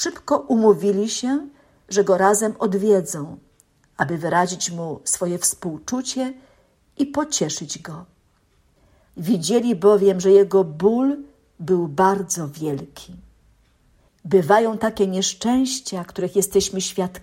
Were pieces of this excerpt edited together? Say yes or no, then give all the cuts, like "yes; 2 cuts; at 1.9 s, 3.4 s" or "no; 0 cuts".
yes; 2 cuts; at 9.1 s, 14.1 s